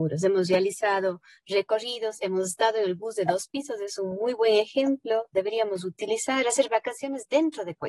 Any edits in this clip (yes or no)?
no